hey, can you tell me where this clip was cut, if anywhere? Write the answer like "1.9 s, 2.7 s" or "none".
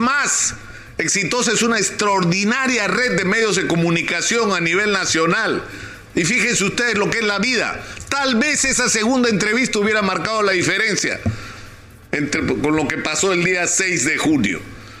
6.1 s